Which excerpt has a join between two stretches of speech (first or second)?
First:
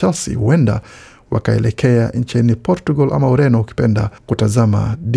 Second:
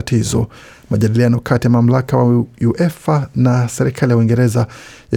first